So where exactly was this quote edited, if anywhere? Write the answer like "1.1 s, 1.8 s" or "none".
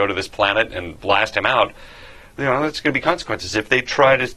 none